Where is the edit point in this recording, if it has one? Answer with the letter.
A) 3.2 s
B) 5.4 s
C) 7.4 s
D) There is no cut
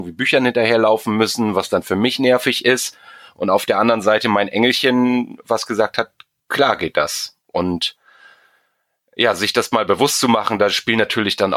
B